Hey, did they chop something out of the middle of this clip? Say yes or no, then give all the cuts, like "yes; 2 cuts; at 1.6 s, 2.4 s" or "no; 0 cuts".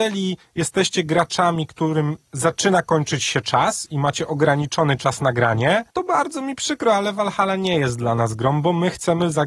yes; 1 cut; at 5.9 s